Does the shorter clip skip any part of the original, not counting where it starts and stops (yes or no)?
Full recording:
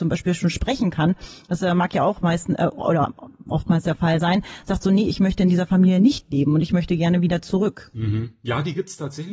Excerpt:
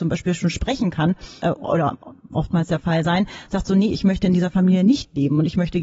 yes